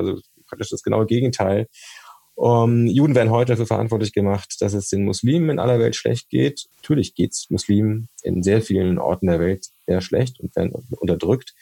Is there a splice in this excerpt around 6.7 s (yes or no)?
yes